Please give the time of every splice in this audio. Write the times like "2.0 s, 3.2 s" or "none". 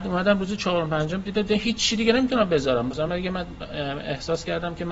none